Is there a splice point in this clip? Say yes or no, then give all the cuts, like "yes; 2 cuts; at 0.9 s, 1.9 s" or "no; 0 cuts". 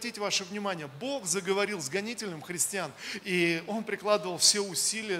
yes; 1 cut; at 3.2 s